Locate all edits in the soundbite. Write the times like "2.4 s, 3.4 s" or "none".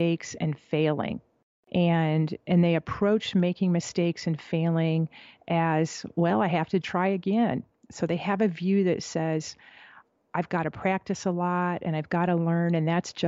6.8 s